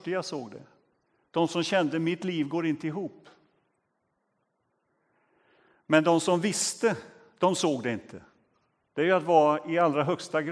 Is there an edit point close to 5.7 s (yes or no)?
no